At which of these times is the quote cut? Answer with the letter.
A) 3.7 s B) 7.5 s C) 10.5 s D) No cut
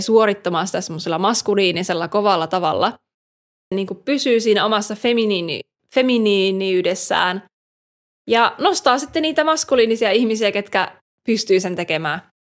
A